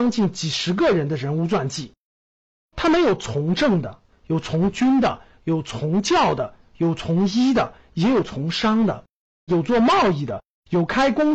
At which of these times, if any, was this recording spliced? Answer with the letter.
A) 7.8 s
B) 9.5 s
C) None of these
B